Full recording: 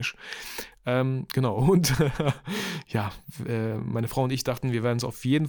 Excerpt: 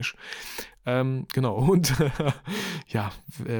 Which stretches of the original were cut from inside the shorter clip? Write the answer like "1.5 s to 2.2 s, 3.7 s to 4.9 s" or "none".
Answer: none